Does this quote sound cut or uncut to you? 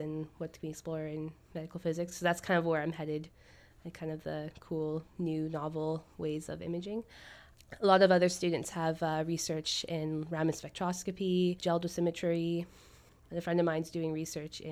uncut